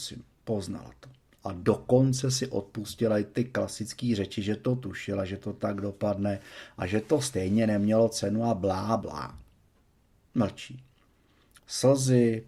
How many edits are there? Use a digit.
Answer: 2